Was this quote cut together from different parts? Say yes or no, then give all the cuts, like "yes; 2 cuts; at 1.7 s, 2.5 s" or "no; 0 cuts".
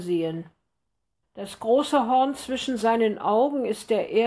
yes; 1 cut; at 1.2 s